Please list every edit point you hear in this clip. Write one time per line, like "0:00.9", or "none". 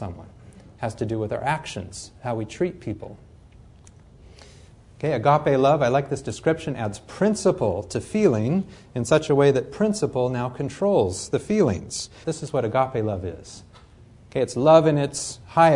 0:12.2